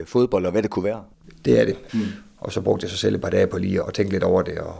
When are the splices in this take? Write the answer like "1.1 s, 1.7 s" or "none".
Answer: 1.9 s, 3.8 s